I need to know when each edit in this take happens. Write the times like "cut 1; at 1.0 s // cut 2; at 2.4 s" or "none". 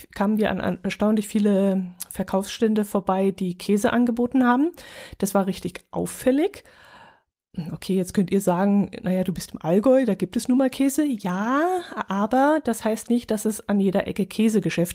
none